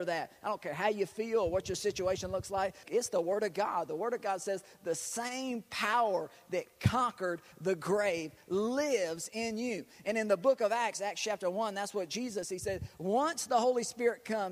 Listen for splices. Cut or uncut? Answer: cut